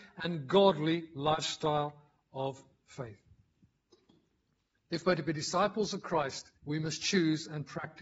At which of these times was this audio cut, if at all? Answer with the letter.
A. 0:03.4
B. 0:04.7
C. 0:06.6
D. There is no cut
C